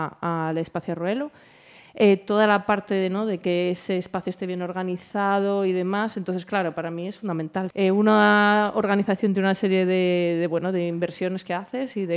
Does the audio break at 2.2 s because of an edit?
no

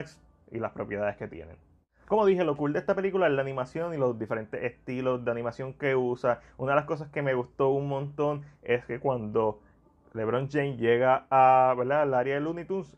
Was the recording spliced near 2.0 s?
no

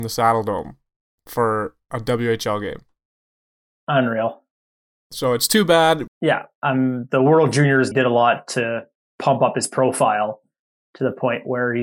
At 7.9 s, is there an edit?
yes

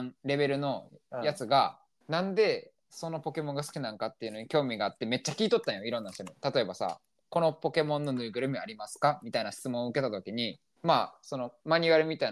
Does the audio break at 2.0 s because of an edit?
yes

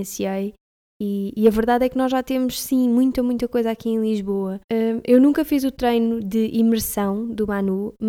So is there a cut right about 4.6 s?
yes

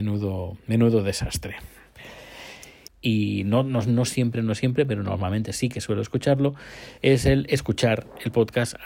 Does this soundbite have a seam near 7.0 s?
yes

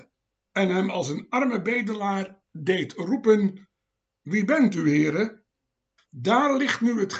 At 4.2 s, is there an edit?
no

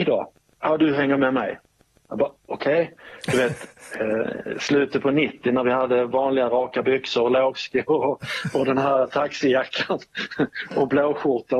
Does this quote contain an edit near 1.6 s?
no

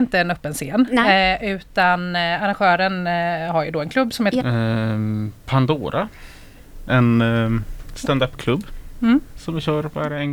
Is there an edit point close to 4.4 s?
yes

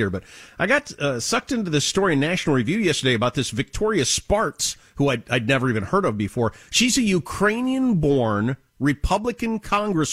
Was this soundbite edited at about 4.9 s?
no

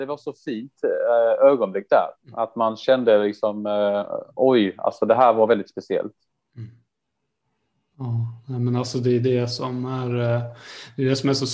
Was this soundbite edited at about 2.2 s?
yes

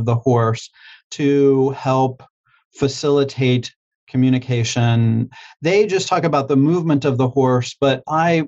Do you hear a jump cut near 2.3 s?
no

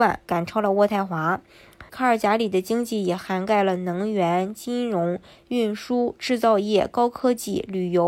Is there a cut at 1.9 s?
yes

